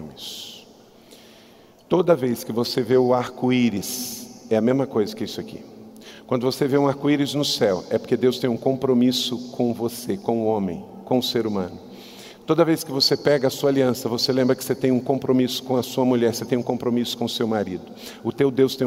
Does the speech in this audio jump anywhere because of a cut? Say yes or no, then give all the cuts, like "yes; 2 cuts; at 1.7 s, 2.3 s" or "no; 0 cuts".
no; 0 cuts